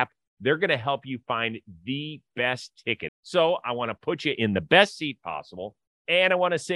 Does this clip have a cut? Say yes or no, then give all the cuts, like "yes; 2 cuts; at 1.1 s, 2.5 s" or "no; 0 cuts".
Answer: yes; 1 cut; at 3.1 s